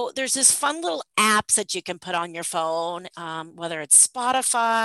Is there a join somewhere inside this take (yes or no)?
no